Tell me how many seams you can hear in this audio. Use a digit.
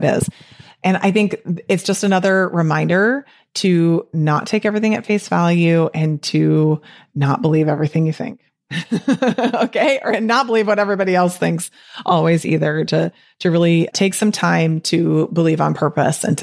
0